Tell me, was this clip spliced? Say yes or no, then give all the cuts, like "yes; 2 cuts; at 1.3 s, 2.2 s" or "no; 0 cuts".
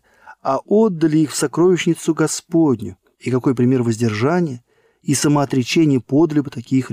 no; 0 cuts